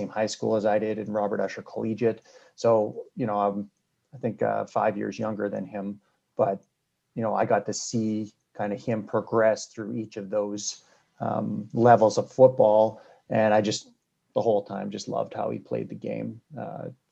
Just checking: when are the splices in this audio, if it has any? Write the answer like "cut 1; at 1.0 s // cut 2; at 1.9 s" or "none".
none